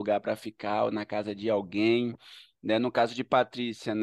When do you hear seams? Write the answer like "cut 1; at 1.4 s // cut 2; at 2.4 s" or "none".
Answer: none

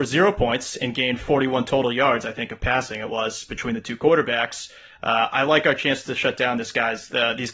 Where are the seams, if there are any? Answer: none

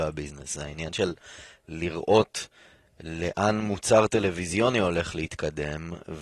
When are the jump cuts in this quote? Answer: none

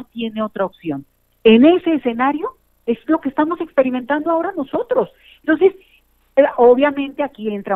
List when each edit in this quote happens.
none

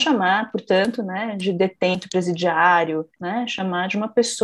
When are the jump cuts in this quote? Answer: cut 1; at 3.2 s

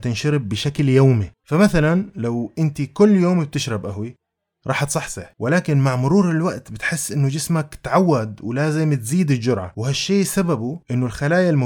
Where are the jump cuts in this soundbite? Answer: cut 1; at 1.4 s

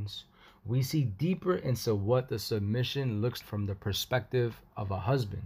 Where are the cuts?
cut 1; at 3.4 s

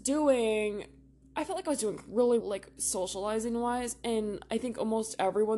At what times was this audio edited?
cut 1; at 2.4 s

